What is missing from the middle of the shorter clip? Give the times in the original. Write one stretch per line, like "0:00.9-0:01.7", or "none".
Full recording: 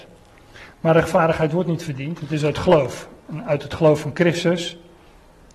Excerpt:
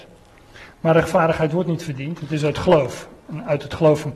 none